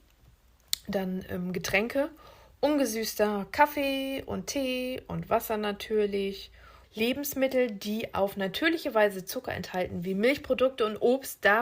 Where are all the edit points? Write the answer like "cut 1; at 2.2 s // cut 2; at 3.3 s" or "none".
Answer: cut 1; at 6.8 s